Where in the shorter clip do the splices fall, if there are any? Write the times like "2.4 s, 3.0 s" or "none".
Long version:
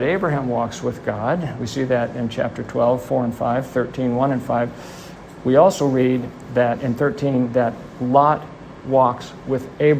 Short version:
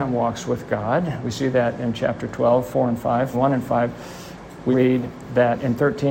3.3 s, 4.7 s

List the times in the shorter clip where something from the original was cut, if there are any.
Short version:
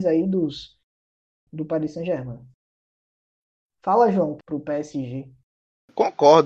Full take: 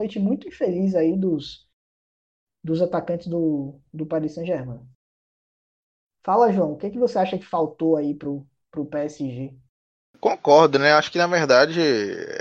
1.5 s, 4.4 s

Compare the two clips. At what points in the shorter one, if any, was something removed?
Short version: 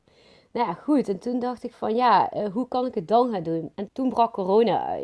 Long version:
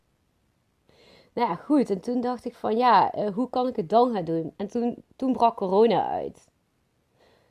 3.9 s

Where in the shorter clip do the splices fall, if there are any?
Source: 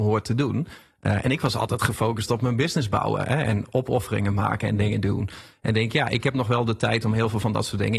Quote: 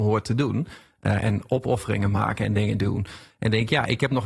1.2 s

